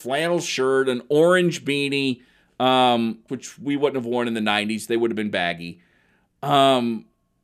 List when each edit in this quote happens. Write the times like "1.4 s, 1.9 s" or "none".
3.3 s